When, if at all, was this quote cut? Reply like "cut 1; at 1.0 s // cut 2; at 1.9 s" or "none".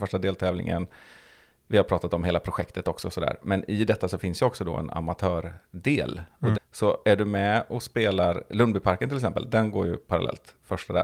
cut 1; at 6.5 s